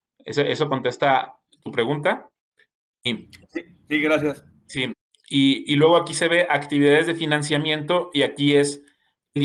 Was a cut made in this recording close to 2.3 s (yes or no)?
no